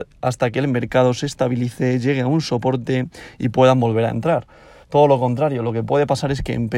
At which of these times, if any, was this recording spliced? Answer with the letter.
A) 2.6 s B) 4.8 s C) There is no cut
B